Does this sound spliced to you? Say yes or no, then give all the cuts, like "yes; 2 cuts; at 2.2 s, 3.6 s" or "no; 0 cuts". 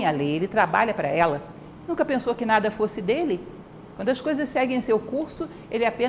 yes; 1 cut; at 1.9 s